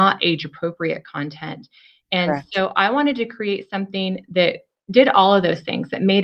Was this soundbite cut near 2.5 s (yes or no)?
no